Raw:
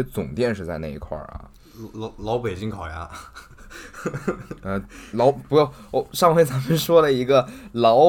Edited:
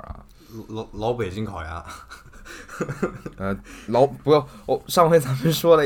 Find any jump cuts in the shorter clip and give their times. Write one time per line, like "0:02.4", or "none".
none